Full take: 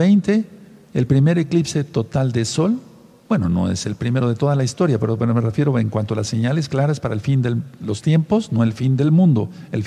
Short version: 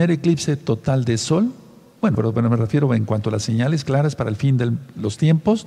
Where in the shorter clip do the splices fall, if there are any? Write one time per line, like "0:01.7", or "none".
0:02.1

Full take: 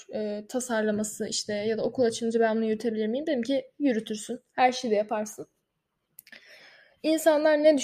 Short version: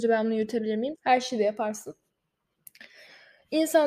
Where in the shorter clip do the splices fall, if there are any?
0:00.9

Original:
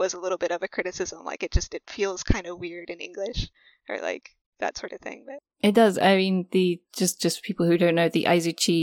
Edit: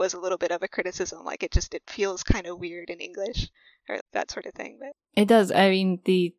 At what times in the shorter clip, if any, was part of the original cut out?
0:04.0

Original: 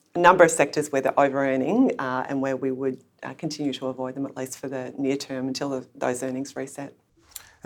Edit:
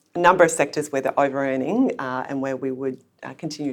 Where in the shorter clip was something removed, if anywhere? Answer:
none

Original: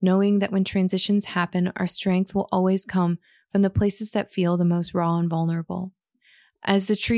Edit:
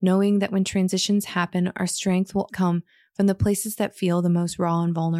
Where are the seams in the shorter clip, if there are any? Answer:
0:02.5

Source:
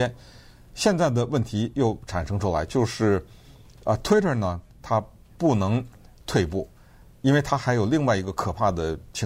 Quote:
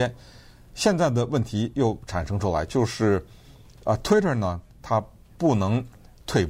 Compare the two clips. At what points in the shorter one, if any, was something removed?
none

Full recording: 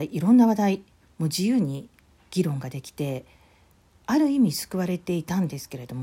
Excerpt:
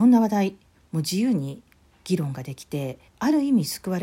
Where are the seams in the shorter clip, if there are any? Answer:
0:03.1

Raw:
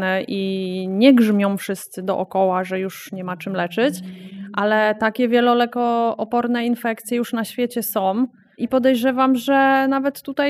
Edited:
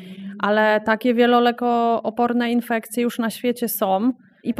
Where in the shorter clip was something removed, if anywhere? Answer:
none

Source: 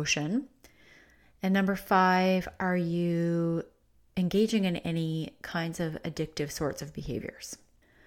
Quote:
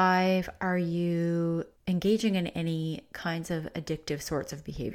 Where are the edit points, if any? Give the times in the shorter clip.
0:01.8

